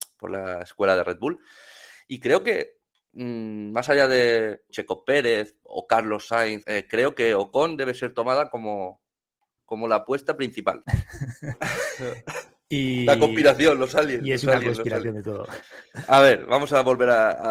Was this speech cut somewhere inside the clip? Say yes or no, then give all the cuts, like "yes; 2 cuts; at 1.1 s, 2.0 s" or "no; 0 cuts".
yes; 3 cuts; at 4.7 s, 6.6 s, 10.8 s